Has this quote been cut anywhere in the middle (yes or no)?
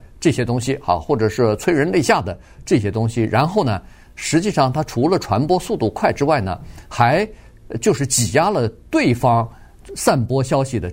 no